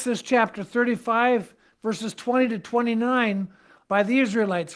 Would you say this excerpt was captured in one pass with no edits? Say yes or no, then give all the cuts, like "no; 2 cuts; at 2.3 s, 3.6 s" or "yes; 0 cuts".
no; 1 cut; at 3.9 s